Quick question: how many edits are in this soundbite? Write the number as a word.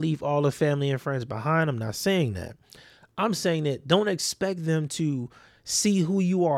zero